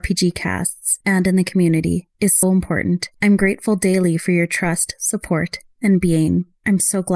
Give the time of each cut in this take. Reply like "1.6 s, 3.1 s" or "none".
2.4 s